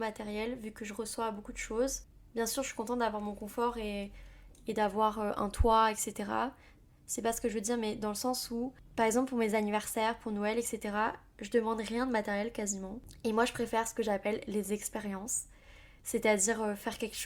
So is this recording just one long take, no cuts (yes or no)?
yes